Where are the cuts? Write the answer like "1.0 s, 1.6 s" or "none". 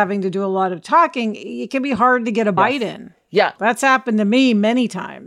none